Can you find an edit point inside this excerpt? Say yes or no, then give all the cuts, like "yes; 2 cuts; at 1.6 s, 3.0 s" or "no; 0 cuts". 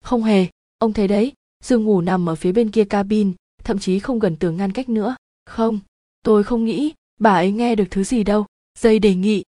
yes; 1 cut; at 8.7 s